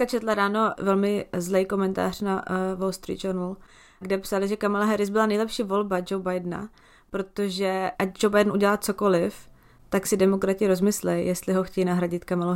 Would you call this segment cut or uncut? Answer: uncut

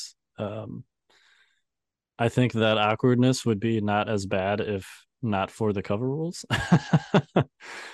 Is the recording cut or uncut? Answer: uncut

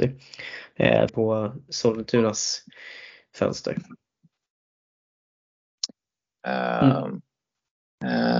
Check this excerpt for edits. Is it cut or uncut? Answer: cut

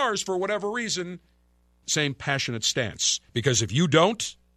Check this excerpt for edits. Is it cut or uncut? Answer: cut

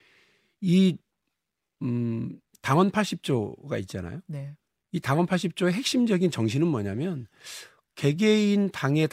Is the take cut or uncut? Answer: uncut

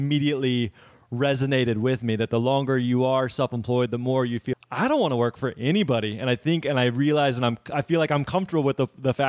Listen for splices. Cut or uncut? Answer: cut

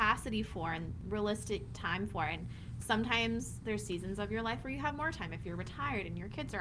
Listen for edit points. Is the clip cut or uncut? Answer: uncut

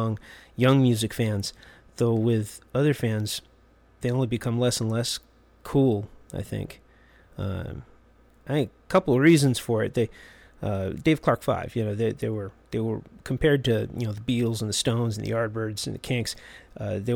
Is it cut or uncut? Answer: uncut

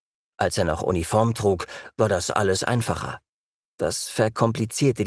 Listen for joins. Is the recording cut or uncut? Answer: cut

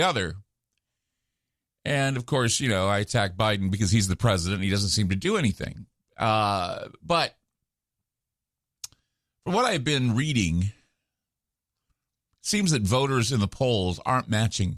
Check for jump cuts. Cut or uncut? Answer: uncut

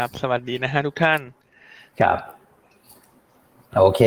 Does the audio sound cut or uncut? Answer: uncut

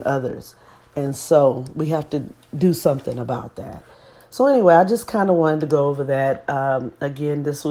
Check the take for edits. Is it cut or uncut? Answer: uncut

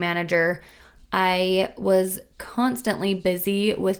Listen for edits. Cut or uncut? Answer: uncut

